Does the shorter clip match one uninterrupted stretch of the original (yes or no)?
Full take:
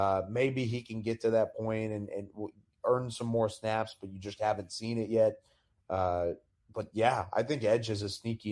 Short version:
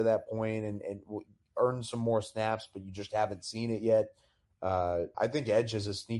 no